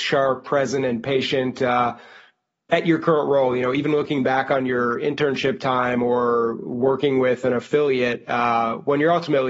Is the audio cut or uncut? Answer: uncut